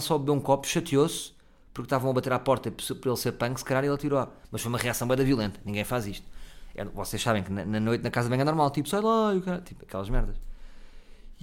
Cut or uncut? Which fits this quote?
uncut